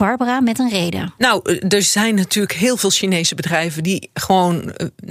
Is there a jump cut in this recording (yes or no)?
no